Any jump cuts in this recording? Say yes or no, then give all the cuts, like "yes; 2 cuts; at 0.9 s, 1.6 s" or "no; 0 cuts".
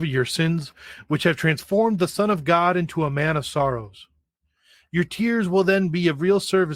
no; 0 cuts